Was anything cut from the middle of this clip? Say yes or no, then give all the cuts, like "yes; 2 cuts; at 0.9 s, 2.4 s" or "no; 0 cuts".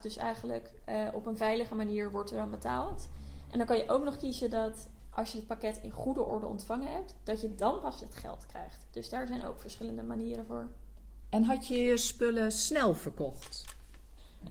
no; 0 cuts